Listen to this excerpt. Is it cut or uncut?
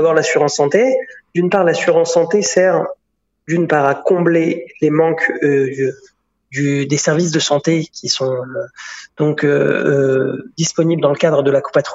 uncut